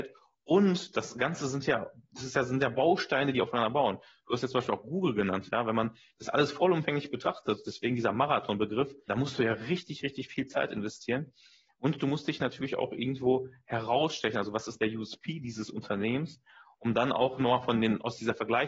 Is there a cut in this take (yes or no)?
yes